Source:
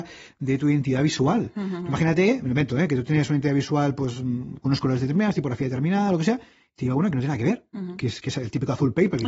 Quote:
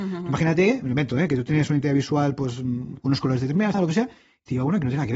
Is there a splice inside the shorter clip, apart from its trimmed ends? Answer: yes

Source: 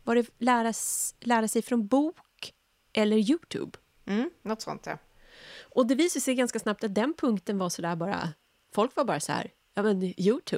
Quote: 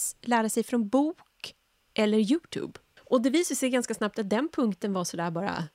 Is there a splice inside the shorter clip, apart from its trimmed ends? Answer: yes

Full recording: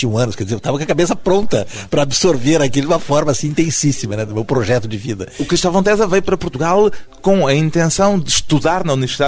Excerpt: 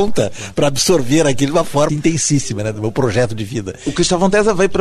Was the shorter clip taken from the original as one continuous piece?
no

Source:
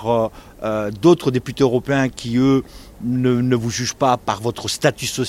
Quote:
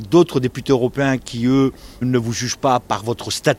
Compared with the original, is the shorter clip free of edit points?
no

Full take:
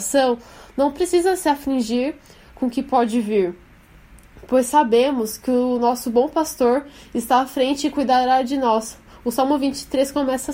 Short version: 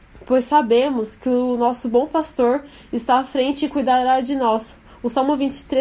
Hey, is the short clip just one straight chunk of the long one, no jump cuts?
yes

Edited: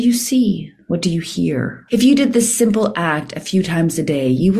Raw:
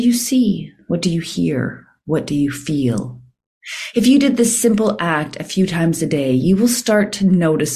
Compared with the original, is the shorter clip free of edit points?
no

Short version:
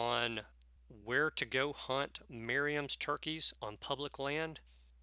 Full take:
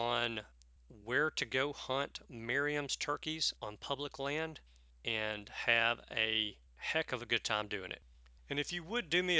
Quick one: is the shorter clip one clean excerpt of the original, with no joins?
yes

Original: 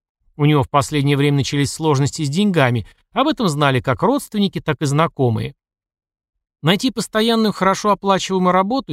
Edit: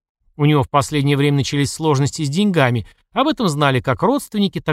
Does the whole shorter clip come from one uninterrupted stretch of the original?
yes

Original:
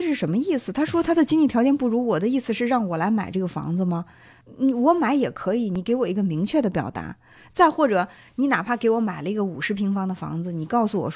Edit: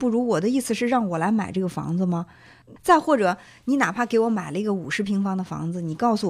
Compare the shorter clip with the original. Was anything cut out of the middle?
yes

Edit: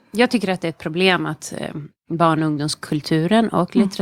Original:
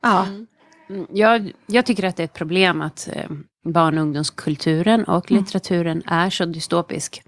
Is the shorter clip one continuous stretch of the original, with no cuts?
yes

